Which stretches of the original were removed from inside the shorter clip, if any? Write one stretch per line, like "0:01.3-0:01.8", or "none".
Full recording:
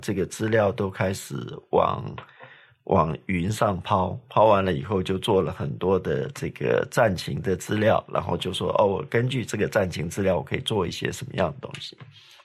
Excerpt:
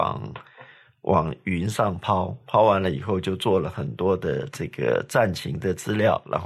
none